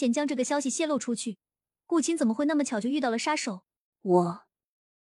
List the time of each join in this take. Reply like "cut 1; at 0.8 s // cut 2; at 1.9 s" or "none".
cut 1; at 3.9 s